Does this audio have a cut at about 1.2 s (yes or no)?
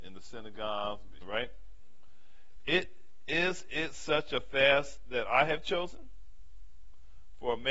yes